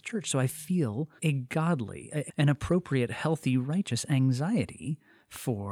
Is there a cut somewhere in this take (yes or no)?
yes